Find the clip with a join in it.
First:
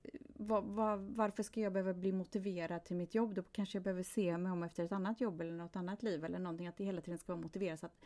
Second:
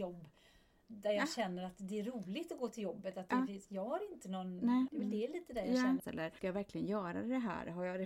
second; 2 cuts; at 4.9 s, 6.0 s

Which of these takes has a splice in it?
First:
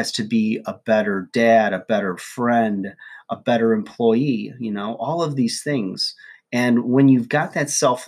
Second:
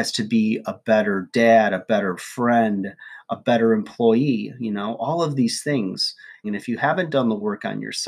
second; 1 cut; at 6.4 s

